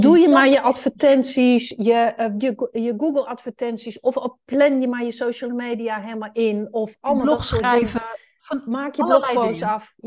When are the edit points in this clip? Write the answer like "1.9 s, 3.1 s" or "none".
none